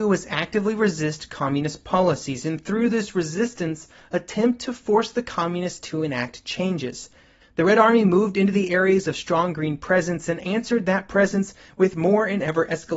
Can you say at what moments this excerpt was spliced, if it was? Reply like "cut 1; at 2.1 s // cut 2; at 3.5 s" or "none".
cut 1; at 7.4 s